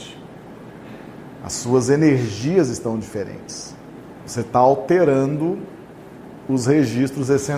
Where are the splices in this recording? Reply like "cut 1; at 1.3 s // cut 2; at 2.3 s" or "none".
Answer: cut 1; at 4.2 s